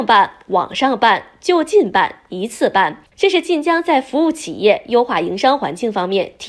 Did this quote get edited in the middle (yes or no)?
no